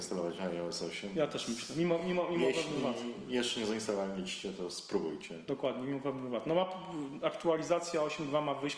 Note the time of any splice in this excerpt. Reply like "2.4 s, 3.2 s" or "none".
none